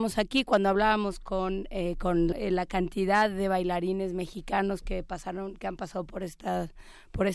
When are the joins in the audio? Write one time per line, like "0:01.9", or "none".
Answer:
0:02.3